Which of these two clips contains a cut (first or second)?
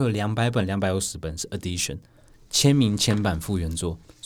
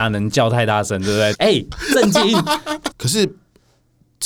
second